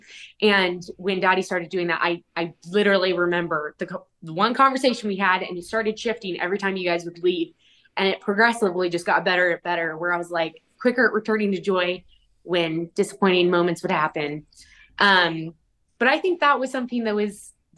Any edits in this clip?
no; 0 cuts

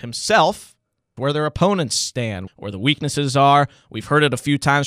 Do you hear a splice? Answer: yes; 2 cuts; at 1.2 s, 2.5 s

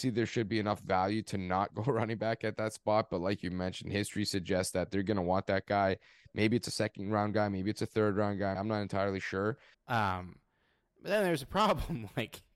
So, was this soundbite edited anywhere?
yes; 2 cuts; at 8.6 s, 9.7 s

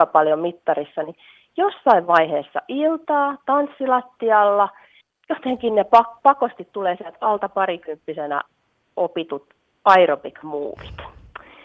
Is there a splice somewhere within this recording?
no; 0 cuts

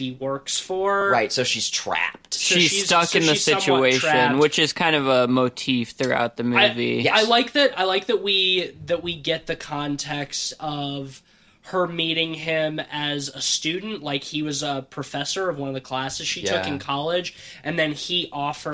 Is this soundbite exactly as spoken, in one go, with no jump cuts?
yes; 0 cuts

